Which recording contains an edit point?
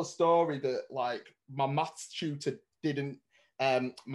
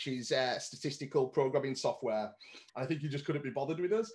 second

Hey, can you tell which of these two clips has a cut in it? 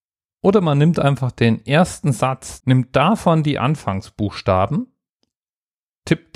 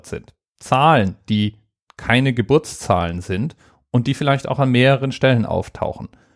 first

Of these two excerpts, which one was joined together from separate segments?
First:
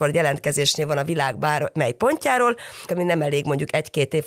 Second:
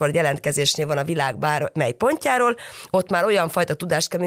first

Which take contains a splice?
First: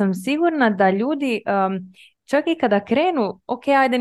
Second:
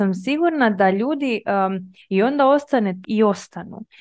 second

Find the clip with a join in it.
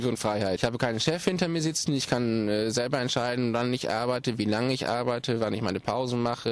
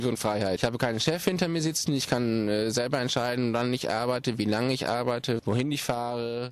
second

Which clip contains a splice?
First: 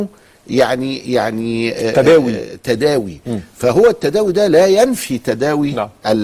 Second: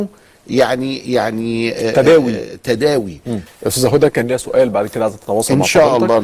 second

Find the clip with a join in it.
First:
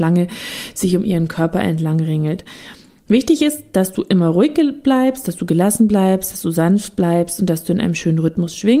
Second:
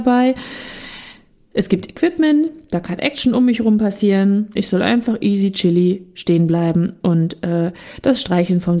second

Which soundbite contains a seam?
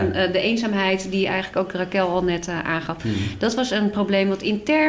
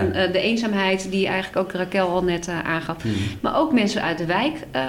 second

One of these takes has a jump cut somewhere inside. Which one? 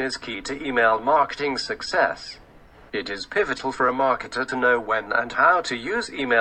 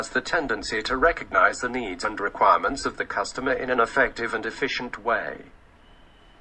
first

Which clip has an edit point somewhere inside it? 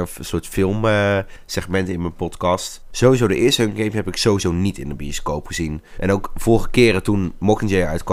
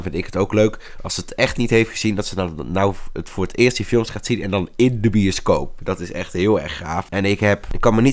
first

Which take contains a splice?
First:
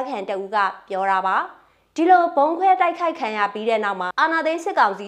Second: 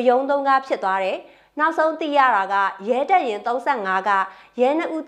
first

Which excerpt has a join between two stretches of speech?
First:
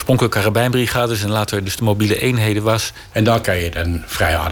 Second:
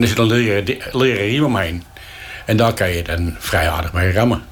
first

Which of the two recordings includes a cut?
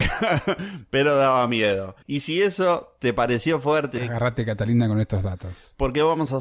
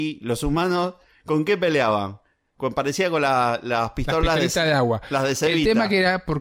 first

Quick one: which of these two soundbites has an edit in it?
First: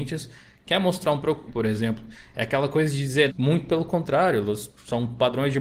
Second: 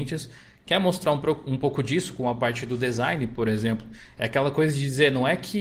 first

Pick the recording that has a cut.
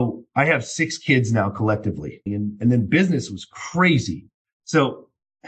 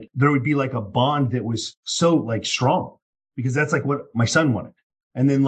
first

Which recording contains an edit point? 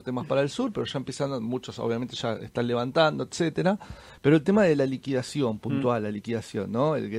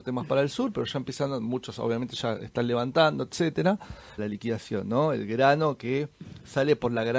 second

